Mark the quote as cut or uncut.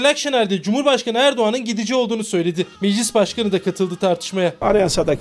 cut